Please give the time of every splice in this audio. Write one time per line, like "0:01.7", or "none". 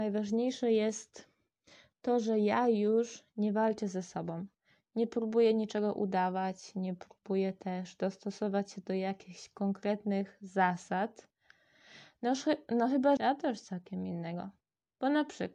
0:13.2